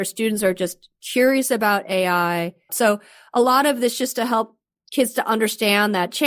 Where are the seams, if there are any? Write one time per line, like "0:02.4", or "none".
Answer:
0:02.7